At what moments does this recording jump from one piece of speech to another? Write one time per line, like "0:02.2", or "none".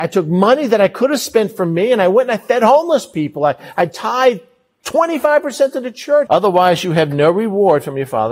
0:06.3